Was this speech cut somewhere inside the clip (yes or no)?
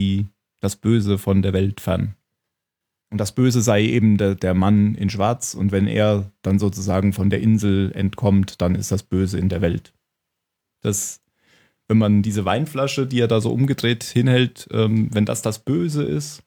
yes